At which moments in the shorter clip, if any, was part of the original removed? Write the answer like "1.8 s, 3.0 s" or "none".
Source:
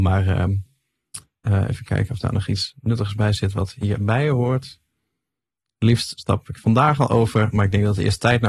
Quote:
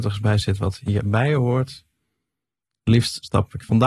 none